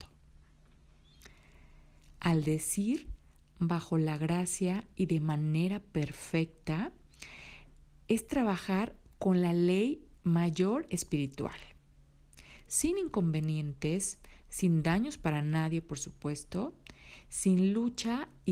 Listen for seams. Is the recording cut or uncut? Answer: cut